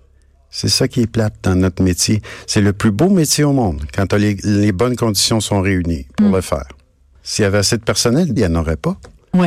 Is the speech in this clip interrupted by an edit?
yes; 2 cuts; at 7.1 s, 8.4 s

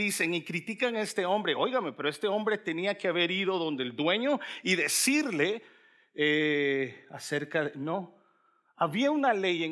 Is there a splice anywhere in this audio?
no; 0 cuts

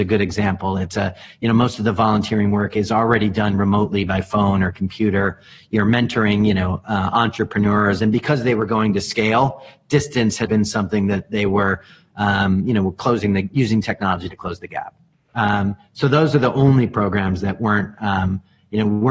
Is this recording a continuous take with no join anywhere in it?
no; 1 cut; at 10.5 s

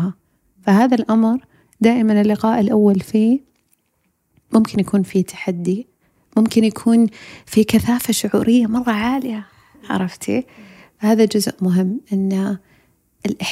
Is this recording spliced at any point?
no; 0 cuts

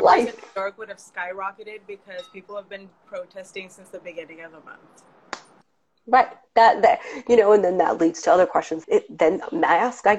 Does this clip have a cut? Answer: yes; 1 cut; at 8.8 s

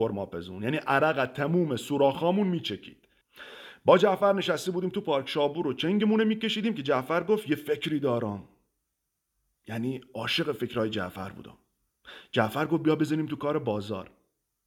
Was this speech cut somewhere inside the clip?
no; 0 cuts

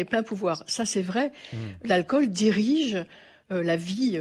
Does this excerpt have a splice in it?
no; 0 cuts

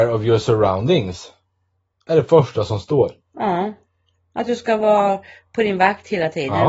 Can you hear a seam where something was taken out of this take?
no; 0 cuts

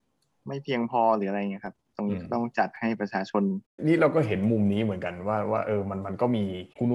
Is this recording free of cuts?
yes; 0 cuts

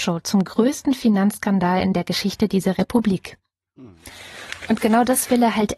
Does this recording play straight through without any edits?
yes; 0 cuts

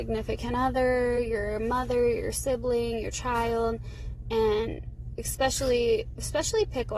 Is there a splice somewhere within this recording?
no; 0 cuts

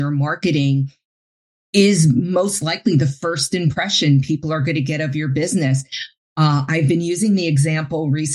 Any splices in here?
no; 0 cuts

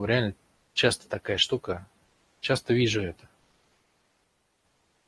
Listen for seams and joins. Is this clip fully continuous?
yes; 0 cuts

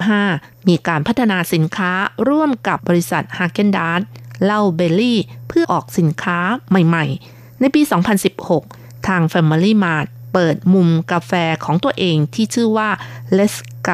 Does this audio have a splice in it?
yes; 2 cuts; at 2.8 s, 5.6 s

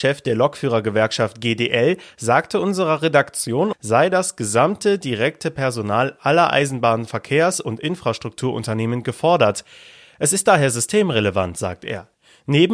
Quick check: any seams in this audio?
yes; 1 cut; at 3.7 s

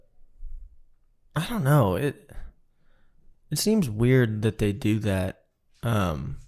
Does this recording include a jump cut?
no; 0 cuts

